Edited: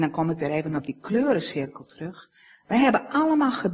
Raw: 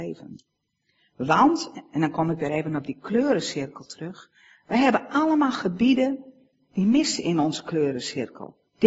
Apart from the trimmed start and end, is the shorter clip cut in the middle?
no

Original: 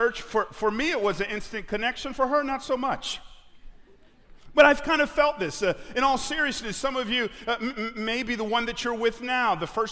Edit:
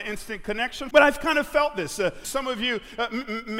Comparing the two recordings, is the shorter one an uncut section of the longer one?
no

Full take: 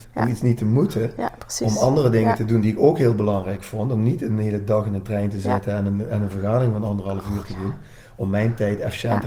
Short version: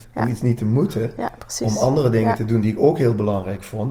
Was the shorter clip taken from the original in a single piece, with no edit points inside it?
yes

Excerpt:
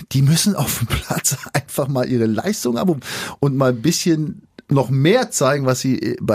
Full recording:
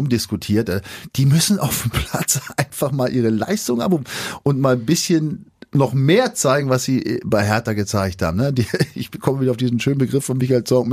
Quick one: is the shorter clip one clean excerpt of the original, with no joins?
yes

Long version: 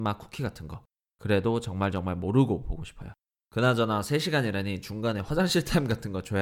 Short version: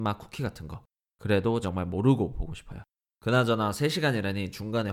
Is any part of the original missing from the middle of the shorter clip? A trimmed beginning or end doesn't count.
yes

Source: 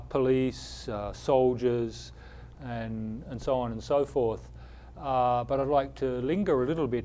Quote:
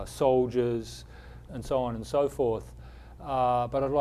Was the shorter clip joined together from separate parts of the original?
yes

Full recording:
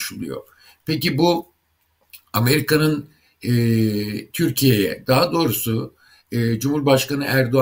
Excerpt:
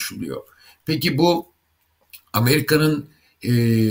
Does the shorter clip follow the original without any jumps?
yes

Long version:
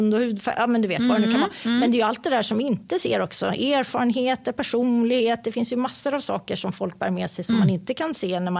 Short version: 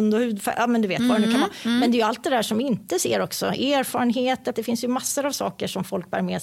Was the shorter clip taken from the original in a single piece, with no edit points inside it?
no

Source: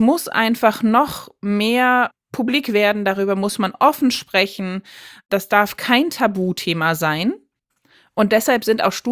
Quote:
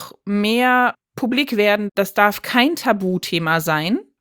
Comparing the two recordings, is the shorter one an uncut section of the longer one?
no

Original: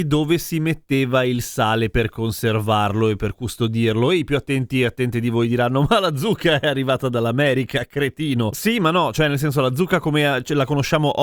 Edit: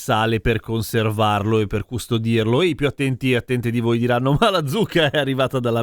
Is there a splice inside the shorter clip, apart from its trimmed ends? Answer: no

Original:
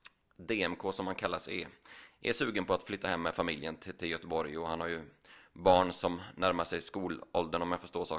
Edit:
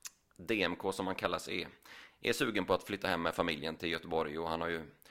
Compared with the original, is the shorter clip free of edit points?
no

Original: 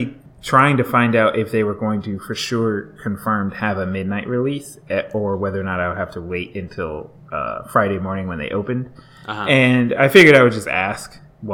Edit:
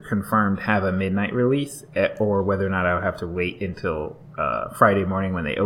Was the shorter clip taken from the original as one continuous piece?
yes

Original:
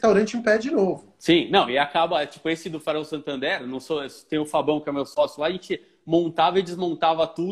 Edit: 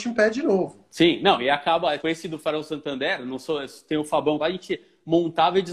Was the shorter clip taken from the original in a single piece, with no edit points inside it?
no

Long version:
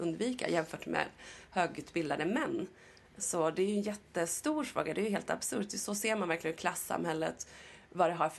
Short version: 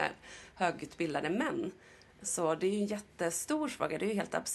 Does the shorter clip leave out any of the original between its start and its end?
no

